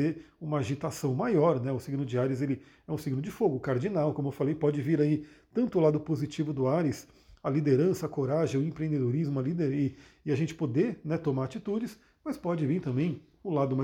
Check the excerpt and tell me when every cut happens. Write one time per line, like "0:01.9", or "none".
none